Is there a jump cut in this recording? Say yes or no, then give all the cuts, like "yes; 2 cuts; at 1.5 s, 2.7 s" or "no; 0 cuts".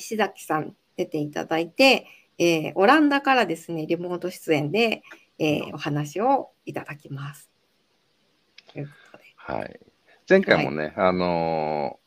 no; 0 cuts